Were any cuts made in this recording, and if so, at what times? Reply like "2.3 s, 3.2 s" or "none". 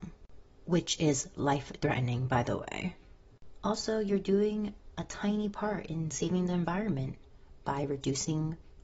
none